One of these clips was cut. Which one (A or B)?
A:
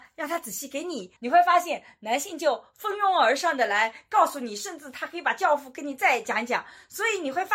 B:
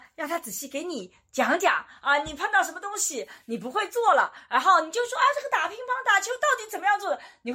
A